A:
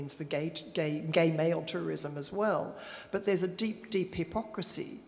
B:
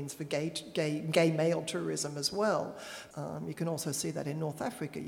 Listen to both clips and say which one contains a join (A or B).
B